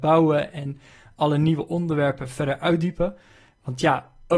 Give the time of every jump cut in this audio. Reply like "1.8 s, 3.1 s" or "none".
none

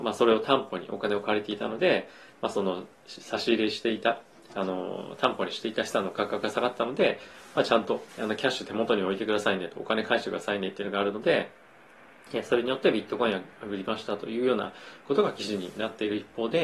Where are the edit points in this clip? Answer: 8.1 s

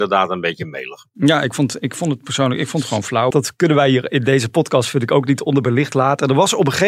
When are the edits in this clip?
3.3 s

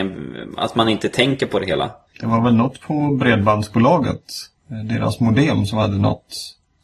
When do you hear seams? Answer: 2.1 s

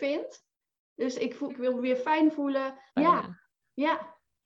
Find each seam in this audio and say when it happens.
1.5 s, 2.9 s

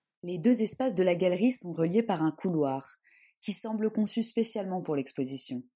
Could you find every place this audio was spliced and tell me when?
none

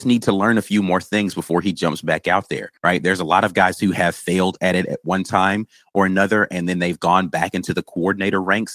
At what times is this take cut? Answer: 2.8 s

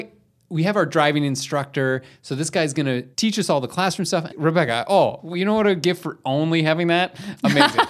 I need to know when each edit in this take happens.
3.1 s, 4.3 s

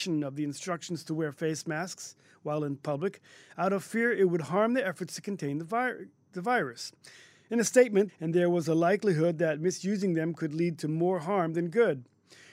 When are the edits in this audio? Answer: 8.1 s

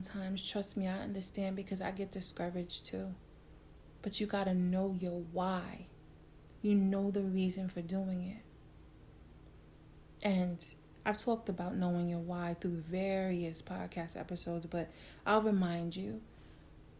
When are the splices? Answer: 4.0 s, 6.6 s

